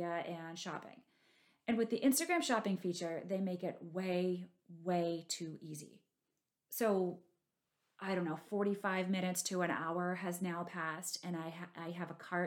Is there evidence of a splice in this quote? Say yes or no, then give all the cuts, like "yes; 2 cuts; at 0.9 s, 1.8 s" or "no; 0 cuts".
no; 0 cuts